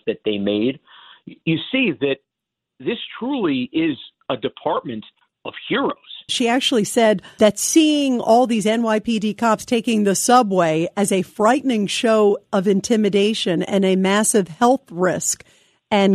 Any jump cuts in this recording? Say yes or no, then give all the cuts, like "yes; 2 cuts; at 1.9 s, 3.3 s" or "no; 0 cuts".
yes; 2 cuts; at 6.3 s, 7.4 s